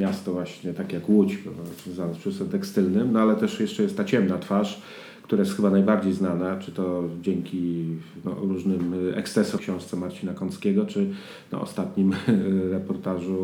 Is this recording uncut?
no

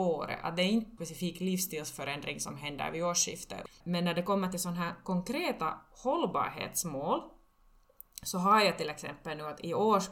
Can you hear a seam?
no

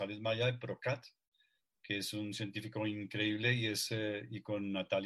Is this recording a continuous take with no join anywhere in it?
yes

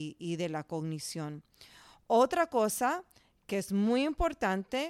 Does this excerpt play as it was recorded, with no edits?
yes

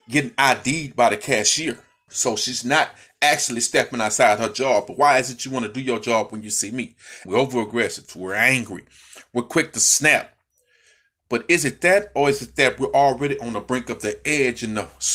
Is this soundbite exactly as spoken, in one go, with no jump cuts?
no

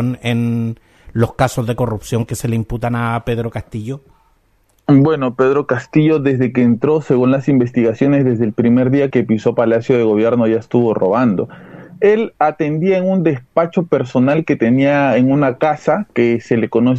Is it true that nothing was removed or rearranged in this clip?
no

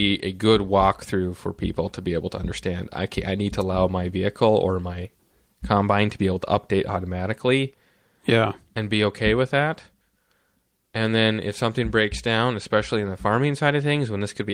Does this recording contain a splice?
no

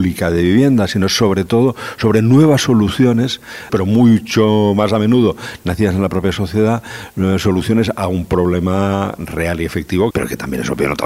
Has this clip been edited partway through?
yes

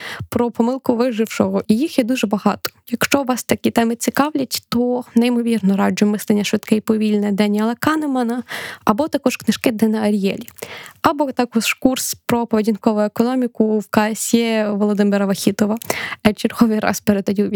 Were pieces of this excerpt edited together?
no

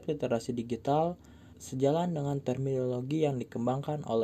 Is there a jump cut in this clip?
yes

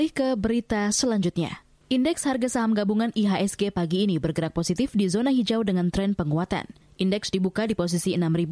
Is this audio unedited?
yes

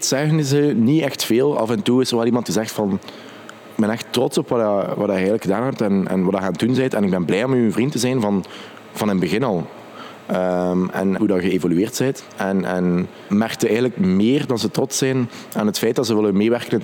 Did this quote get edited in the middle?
yes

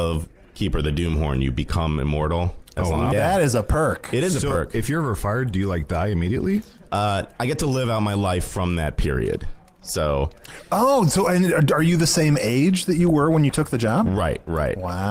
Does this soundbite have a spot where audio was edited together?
yes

